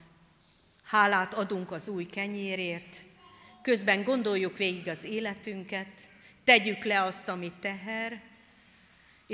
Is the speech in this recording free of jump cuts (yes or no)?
yes